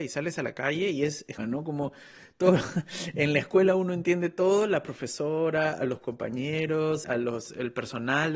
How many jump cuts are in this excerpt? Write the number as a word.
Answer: two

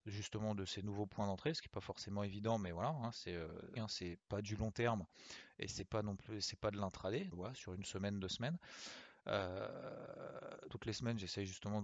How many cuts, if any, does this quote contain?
three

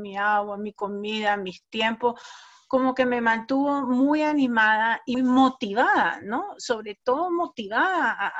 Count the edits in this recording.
one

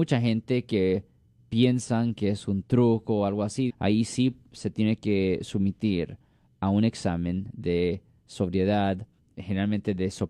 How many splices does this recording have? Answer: one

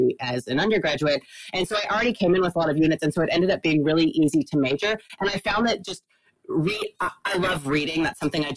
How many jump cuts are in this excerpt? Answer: zero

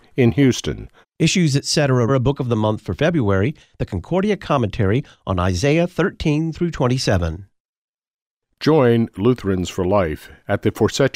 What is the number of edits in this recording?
two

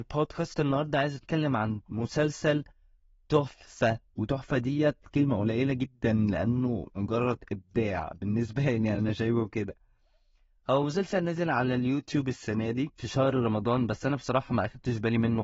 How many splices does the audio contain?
two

